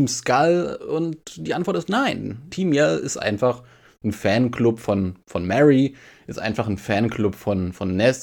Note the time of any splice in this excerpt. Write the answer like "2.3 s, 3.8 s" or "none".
2.5 s